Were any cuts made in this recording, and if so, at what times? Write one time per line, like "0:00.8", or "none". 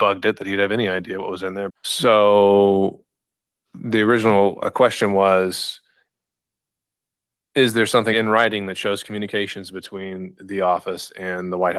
0:01.7
0:08.1